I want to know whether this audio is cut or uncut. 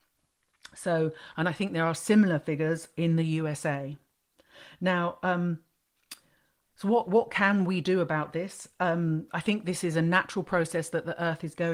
uncut